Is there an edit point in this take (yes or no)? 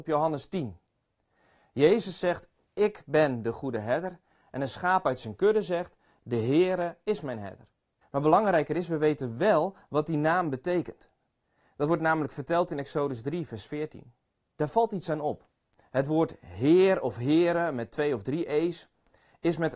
yes